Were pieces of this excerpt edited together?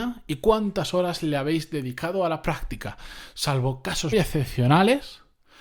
yes; 1 cut; at 4.1 s

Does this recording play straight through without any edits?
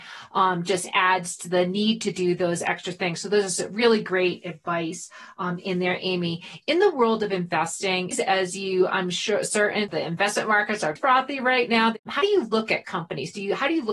no; 2 cuts; at 8.1 s, 11.0 s

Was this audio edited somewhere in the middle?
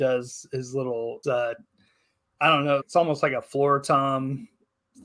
yes; 2 cuts; at 1.2 s, 2.8 s

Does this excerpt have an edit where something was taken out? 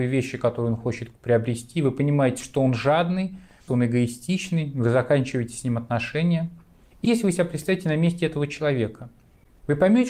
yes; 2 cuts; at 3.7 s, 7.0 s

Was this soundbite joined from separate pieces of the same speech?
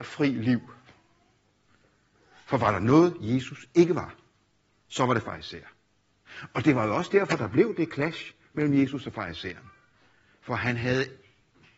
no; 0 cuts

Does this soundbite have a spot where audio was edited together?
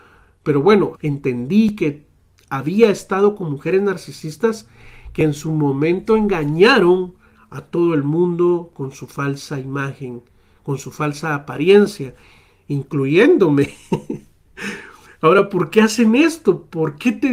yes; 1 cut; at 0.9 s

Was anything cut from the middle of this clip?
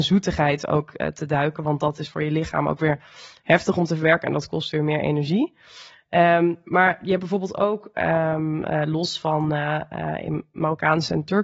no; 0 cuts

